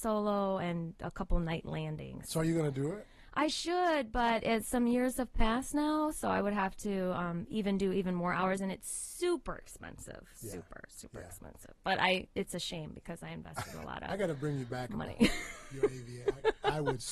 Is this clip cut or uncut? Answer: uncut